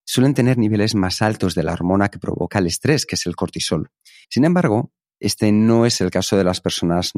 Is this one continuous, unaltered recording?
no; 1 cut; at 4.2 s

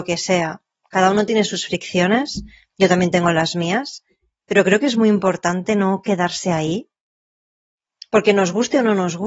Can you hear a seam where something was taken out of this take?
no; 0 cuts

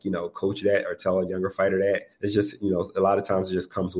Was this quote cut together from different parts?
yes; 1 cut; at 2.1 s

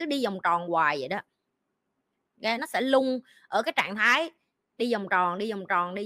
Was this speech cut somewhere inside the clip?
no; 0 cuts

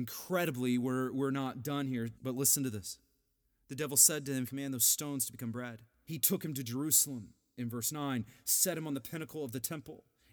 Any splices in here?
yes; 3 cuts; at 2.1 s, 4.5 s, 6.0 s

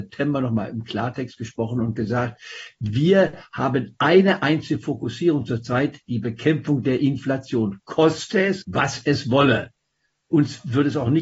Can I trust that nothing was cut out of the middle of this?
no; 1 cut; at 8.6 s

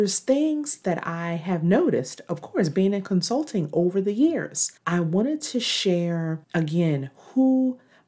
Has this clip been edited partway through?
yes; 2 cuts; at 4.8 s, 6.4 s

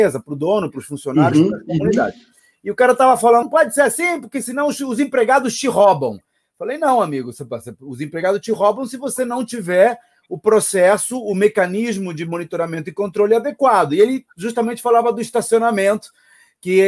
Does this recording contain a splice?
yes; 1 cut; at 3.4 s

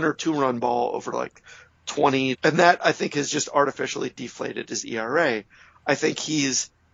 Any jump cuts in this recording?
yes; 1 cut; at 2.4 s

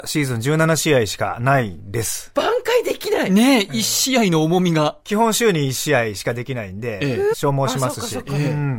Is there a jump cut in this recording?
yes; 2 cuts; at 2.3 s, 7.3 s

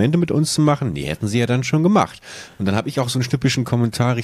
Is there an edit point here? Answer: no; 0 cuts

